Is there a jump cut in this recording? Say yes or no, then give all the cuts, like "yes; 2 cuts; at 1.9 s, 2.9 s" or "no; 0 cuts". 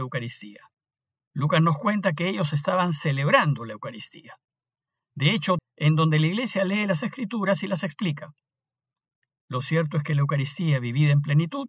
yes; 1 cut; at 5.6 s